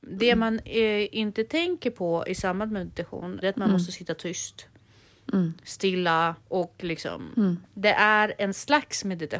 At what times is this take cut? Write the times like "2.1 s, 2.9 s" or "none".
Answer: 3.4 s, 6.4 s, 7.6 s